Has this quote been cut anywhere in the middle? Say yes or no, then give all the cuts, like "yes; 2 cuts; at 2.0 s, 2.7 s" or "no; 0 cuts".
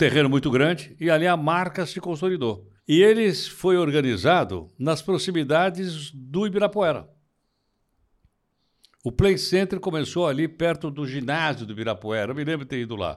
yes; 1 cut; at 2.8 s